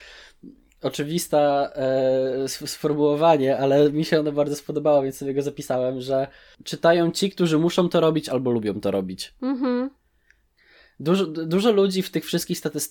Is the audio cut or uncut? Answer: uncut